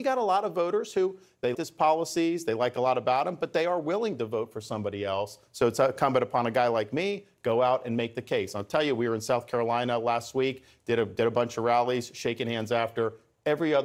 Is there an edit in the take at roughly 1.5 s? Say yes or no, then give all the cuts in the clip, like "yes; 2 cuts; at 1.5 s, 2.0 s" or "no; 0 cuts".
yes; 1 cut; at 1.5 s